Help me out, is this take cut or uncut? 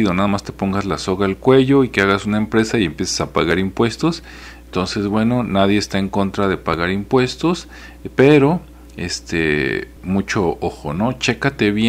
uncut